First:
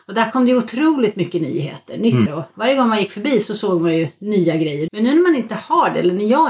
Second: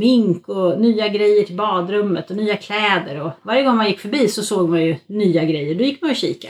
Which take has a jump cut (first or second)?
first